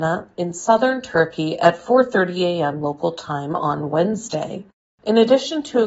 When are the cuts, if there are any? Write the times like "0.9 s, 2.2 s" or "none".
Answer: 4.9 s